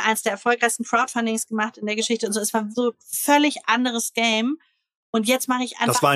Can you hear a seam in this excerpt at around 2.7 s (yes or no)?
yes